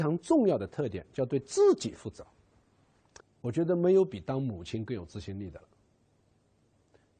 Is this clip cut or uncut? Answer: cut